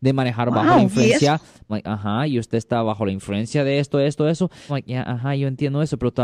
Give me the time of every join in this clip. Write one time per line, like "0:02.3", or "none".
0:01.7
0:04.7